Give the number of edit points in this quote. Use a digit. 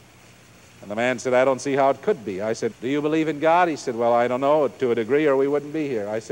1